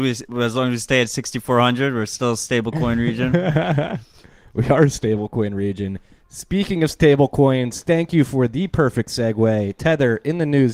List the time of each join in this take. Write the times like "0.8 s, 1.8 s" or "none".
none